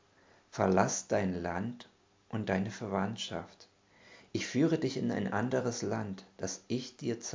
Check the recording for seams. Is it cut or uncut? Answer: uncut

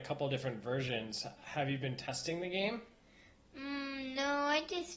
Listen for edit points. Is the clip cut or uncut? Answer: uncut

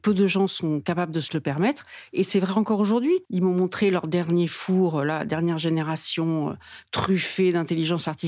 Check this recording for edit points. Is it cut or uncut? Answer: cut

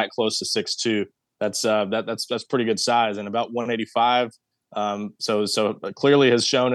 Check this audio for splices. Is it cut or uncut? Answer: uncut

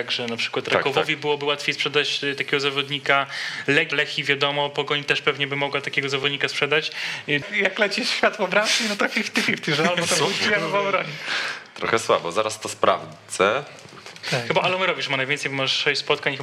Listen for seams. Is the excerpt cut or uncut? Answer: cut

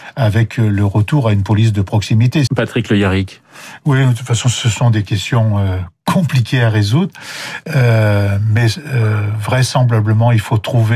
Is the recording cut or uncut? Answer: cut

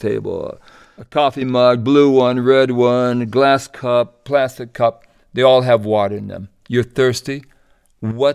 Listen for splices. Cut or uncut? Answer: uncut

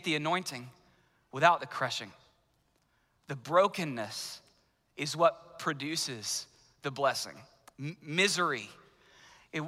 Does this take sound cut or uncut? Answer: uncut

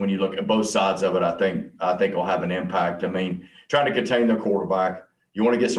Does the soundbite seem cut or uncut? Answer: uncut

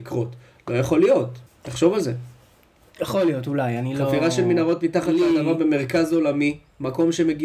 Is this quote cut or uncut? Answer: uncut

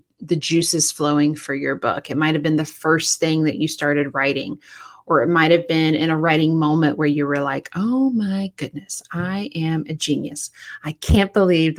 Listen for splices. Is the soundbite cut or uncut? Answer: uncut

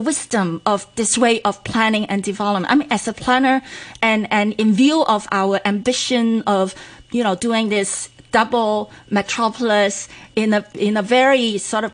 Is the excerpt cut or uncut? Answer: uncut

